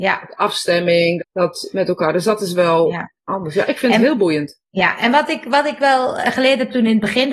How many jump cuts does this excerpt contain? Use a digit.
1